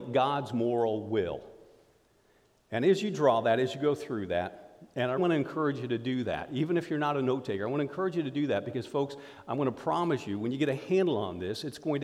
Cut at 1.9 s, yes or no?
no